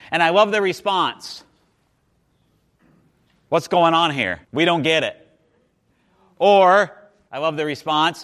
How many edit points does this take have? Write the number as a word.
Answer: one